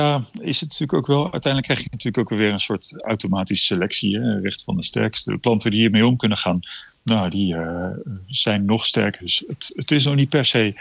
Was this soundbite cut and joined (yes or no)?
yes